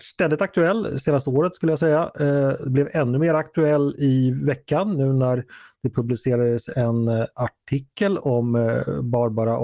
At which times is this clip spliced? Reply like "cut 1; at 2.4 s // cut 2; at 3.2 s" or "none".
none